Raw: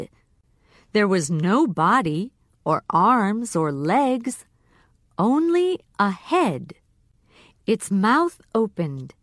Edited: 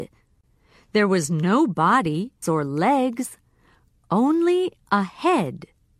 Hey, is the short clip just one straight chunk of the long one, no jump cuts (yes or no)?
no